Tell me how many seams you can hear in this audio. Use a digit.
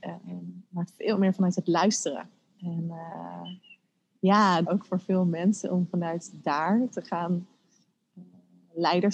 2